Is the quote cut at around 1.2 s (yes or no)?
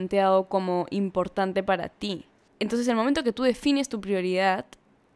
no